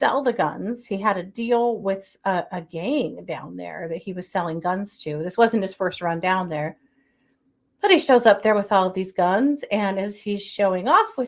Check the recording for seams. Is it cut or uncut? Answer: uncut